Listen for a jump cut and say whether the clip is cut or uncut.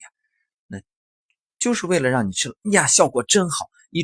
uncut